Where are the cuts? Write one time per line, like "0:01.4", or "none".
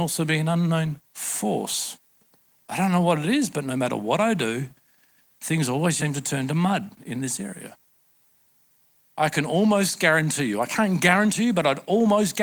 0:06.0